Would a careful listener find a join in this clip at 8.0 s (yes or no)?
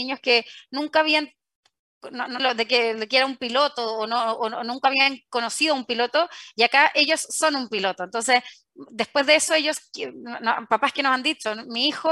no